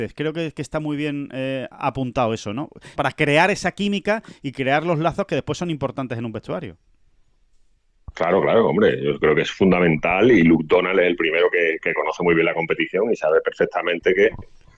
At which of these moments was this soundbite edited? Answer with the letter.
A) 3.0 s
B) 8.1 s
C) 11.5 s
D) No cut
A